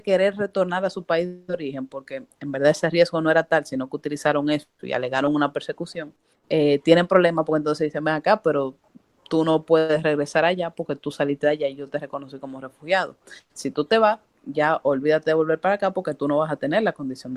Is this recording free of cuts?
yes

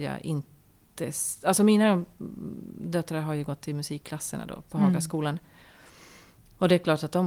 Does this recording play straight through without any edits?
yes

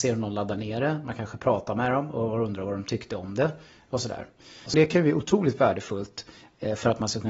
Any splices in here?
yes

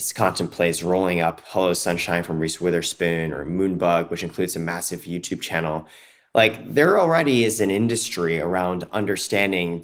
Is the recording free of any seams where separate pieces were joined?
yes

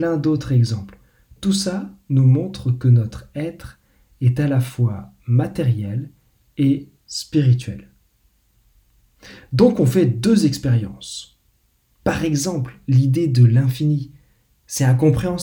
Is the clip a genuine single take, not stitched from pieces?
no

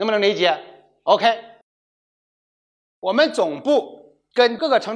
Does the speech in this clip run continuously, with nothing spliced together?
yes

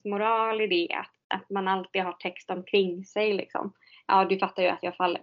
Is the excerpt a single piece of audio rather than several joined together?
no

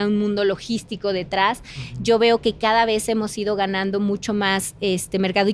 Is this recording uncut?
yes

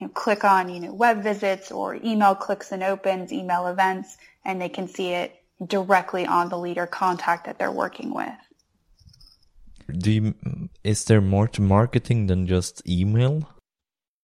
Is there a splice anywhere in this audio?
yes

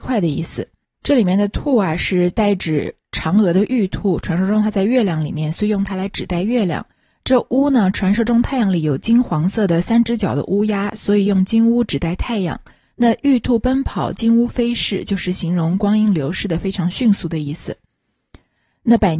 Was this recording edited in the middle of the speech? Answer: no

